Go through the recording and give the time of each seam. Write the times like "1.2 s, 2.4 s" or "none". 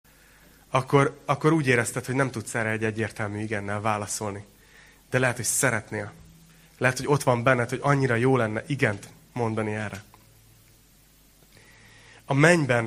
none